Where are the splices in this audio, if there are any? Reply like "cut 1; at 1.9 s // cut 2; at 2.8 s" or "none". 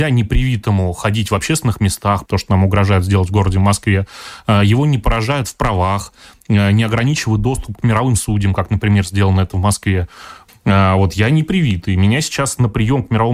cut 1; at 2.3 s // cut 2; at 10.5 s